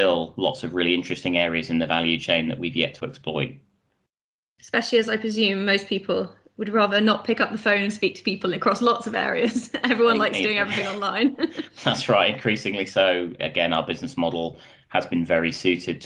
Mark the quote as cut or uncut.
uncut